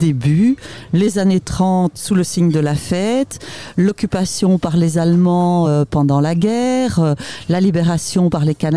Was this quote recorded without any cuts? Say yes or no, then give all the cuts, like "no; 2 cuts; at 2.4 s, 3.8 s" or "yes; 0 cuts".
yes; 0 cuts